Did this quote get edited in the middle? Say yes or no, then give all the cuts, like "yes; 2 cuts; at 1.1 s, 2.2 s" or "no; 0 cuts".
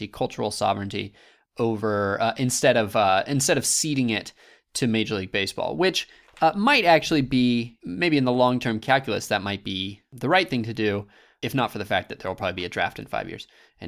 no; 0 cuts